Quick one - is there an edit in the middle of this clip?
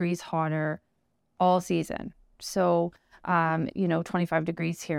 yes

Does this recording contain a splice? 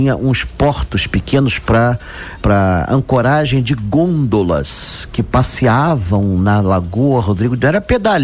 yes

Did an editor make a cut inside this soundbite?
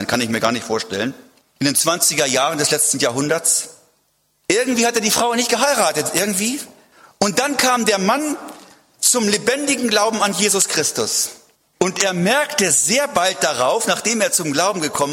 no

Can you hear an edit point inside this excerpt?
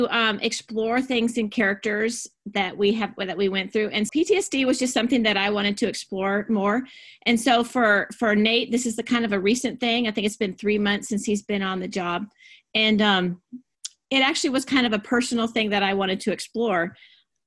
yes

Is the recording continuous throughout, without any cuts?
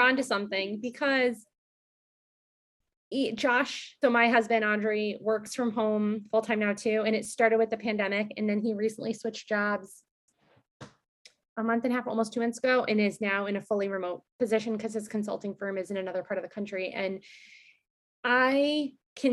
no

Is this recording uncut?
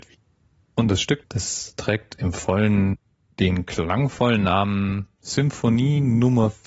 no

